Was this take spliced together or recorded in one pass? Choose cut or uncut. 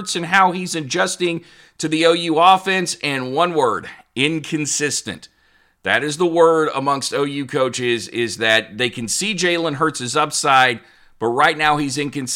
uncut